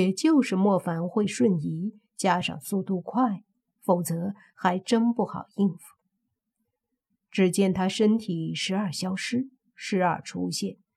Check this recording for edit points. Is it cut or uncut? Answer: uncut